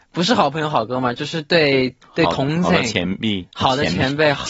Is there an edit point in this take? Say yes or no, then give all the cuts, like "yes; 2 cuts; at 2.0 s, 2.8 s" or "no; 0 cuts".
no; 0 cuts